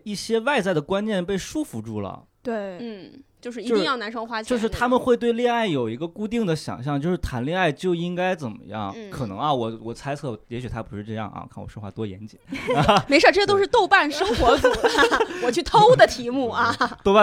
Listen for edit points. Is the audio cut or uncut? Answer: cut